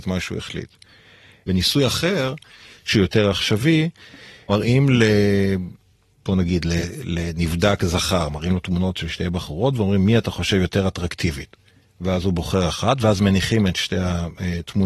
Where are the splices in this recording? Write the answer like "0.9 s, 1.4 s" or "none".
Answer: none